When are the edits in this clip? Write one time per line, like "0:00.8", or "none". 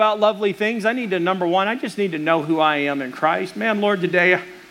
none